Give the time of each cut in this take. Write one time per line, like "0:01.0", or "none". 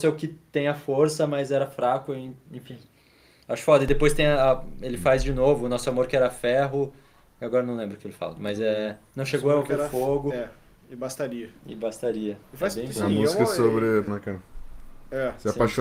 0:12.4
0:14.1